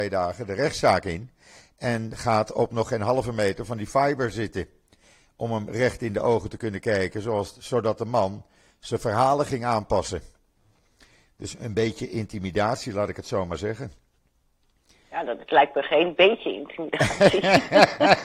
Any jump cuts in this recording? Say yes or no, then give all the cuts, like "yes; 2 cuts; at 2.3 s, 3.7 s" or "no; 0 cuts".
no; 0 cuts